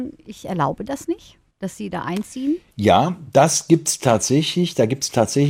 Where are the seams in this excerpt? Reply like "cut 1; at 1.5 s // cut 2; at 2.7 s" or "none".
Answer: none